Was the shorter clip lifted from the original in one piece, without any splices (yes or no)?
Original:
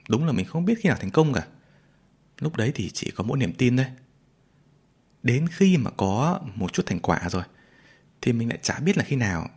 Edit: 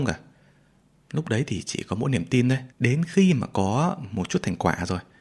no